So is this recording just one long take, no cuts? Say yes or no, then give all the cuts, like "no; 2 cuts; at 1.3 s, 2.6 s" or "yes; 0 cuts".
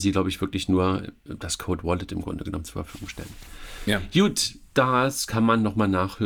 yes; 0 cuts